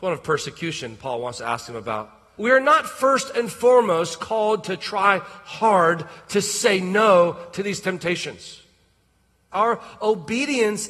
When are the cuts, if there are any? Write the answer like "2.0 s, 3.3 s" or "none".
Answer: 2.4 s, 9.5 s